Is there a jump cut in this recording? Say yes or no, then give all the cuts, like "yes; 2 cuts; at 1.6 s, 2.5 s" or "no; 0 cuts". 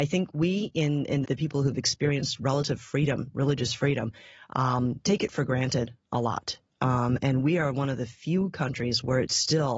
yes; 1 cut; at 1.2 s